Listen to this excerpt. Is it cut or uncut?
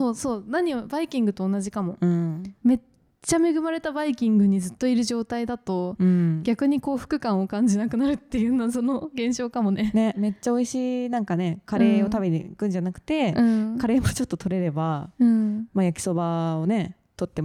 uncut